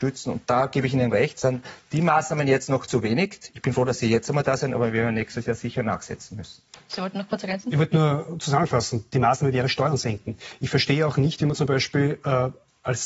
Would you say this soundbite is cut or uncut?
uncut